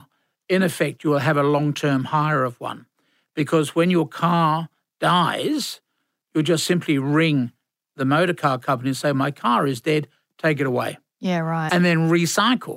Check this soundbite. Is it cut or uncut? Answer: cut